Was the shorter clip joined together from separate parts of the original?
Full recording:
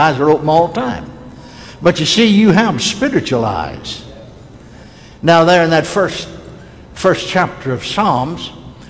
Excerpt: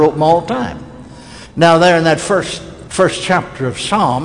yes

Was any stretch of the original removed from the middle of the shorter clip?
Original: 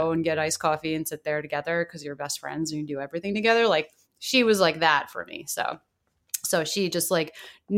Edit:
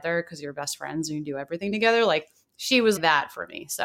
yes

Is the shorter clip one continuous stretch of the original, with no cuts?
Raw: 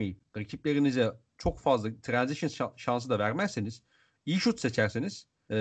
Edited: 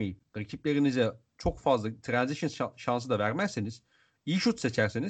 yes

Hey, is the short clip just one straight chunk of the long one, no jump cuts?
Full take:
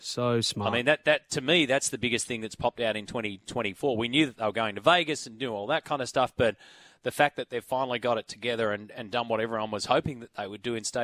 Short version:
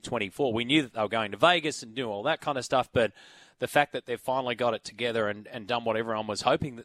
yes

